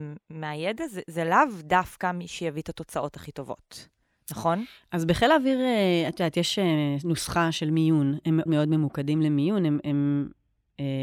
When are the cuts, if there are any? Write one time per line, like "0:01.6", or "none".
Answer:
0:08.5